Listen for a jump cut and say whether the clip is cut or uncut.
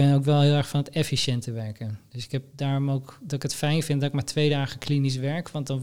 uncut